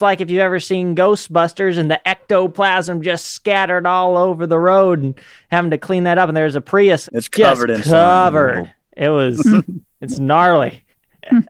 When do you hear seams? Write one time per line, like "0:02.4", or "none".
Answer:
none